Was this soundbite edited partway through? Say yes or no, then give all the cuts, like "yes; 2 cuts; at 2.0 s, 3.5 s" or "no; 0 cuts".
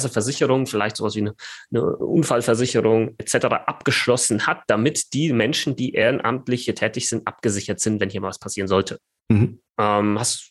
no; 0 cuts